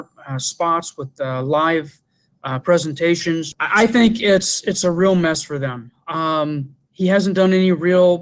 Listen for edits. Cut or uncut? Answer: cut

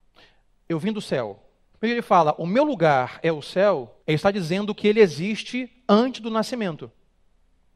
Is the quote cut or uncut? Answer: cut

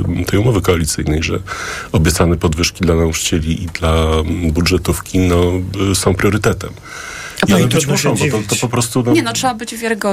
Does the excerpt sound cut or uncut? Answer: uncut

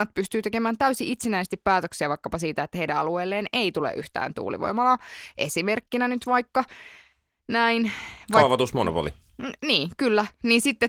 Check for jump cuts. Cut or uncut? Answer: uncut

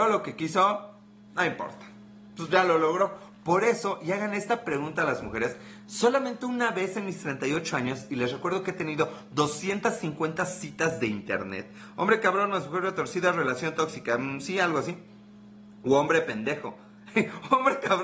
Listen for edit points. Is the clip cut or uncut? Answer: uncut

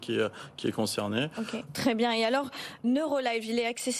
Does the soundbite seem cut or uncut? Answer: cut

